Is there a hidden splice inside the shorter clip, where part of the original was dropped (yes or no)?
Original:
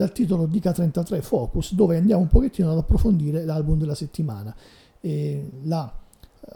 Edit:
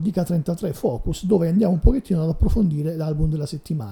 no